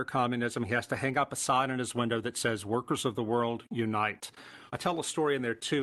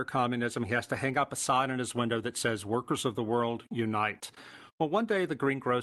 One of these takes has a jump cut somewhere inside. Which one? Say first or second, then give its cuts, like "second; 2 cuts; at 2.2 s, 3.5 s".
first; 1 cut; at 4.7 s